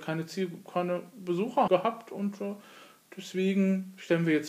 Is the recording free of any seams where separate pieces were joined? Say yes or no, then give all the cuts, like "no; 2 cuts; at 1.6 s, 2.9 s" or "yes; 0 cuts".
no; 1 cut; at 1.7 s